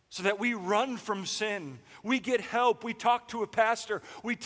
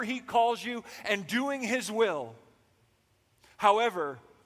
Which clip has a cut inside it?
first; 1 cut; at 2.0 s

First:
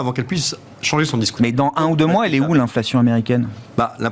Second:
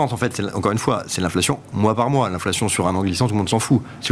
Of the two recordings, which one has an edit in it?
first; 1 cut; at 1.4 s

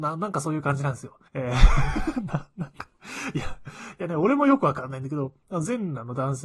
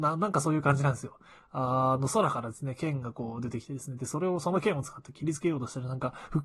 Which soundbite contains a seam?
first; 1 cut; at 1.3 s

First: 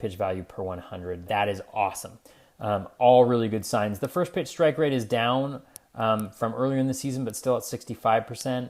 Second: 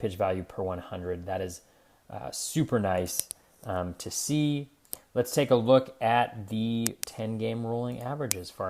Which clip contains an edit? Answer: first; 1 cut; at 1.3 s

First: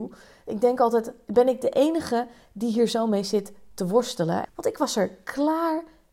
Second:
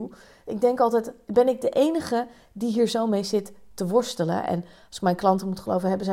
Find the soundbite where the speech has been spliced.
first; 1 cut; at 4.4 s

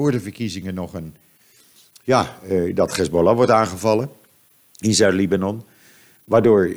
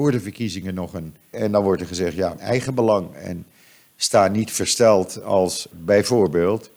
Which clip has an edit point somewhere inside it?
second; 3 cuts; at 1.3 s, 2.4 s, 5.7 s

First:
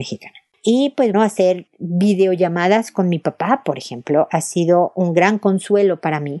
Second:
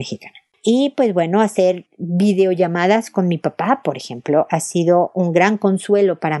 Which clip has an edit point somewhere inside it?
first; 1 cut; at 1.1 s

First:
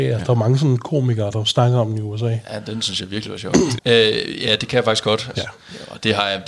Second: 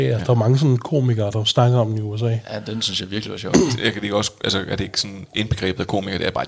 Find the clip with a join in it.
first; 2 cuts; at 3.8 s, 5.3 s

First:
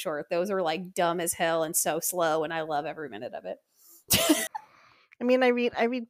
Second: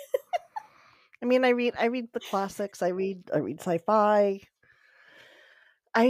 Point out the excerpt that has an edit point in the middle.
first; 1 cut; at 4.5 s

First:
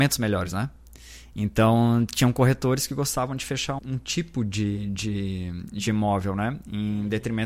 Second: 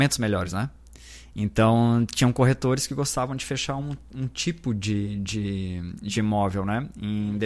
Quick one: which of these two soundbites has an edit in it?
first; 1 cut; at 3.8 s

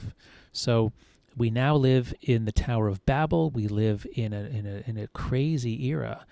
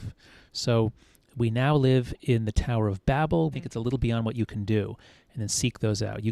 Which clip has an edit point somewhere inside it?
second; 1 cut; at 3.5 s

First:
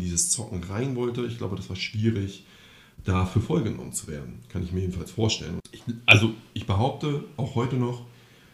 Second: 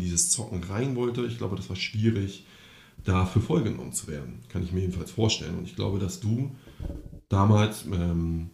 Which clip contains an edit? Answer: first; 1 cut; at 5.6 s

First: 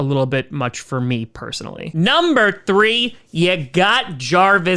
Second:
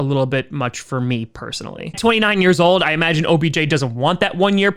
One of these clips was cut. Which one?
second; 1 cut; at 1.9 s

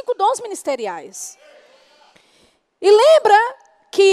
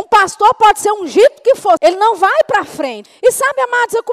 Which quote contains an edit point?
second; 2 cuts; at 1.8 s, 3.1 s

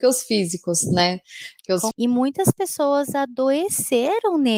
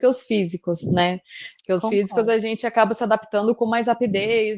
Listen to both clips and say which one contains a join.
first; 1 cut; at 1.9 s

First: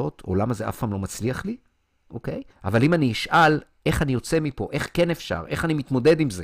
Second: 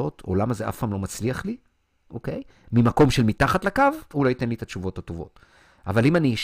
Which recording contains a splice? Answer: first; 1 cut; at 2.5 s

